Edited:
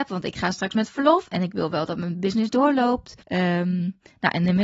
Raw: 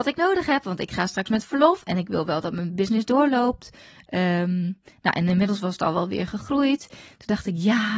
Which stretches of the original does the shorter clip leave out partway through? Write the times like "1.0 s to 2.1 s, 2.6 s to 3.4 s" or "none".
3.8 s to 4.0 s